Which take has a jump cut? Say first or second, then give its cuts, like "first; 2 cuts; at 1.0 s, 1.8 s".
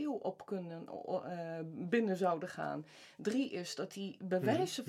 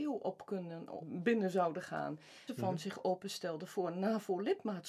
second; 2 cuts; at 1.0 s, 2.5 s